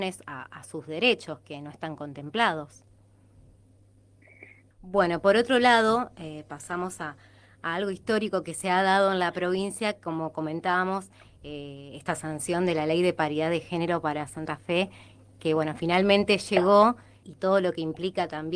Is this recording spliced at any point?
yes; 2 cuts; at 4.7 s, 17.2 s

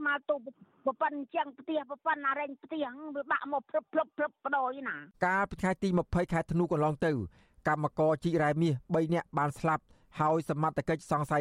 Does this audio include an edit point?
yes; 1 cut; at 5.1 s

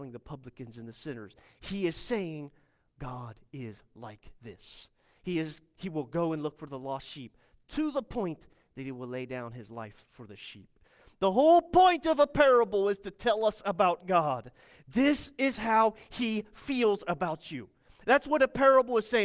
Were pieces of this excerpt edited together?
no; 0 cuts

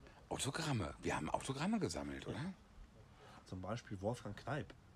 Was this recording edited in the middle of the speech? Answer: yes; 1 cut; at 3.4 s

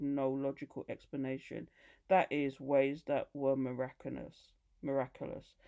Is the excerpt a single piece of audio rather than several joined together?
yes; 0 cuts

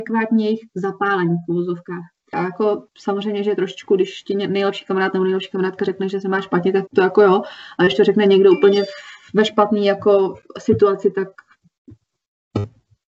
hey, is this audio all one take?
no; 2 cuts; at 2.3 s, 6.9 s

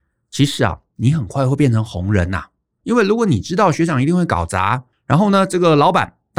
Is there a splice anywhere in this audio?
yes; 2 cuts; at 2.8 s, 4.9 s

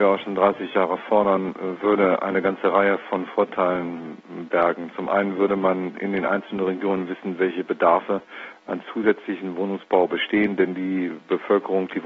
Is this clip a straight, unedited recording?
yes; 0 cuts

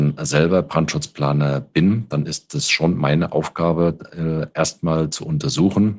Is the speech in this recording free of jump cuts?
yes; 0 cuts

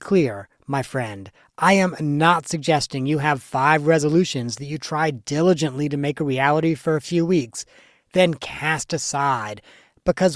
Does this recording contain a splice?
no; 0 cuts

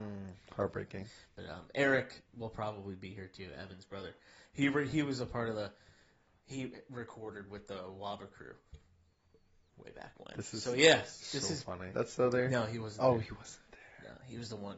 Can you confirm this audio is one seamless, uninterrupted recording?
no; 1 cut; at 11.9 s

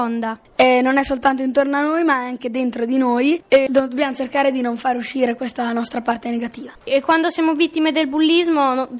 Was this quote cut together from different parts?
no; 0 cuts

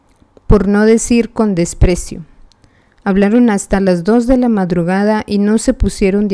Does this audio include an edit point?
no; 0 cuts

